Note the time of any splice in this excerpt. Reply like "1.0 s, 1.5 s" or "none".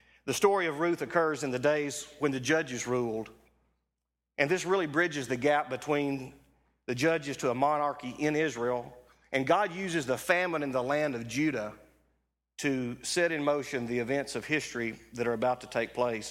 none